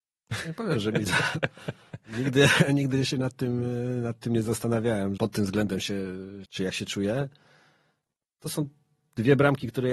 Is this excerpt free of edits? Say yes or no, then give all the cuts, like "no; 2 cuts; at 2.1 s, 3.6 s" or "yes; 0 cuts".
no; 2 cuts; at 5.2 s, 6.4 s